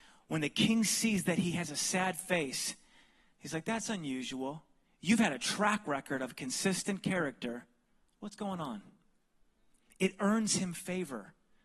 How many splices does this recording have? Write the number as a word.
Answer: zero